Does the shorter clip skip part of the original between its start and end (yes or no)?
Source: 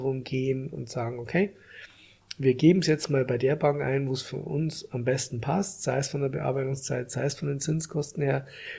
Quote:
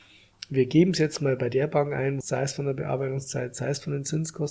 yes